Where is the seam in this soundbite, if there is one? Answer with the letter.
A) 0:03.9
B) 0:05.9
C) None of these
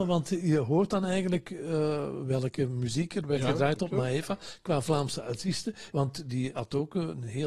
B